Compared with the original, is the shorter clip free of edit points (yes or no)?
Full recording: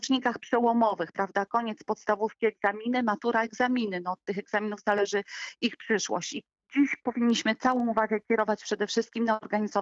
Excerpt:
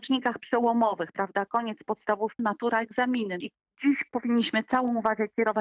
no